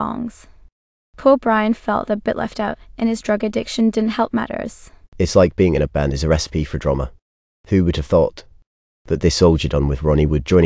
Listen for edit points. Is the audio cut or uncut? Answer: cut